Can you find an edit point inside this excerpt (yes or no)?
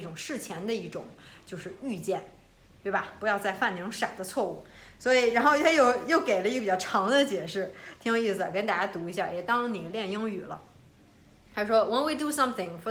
no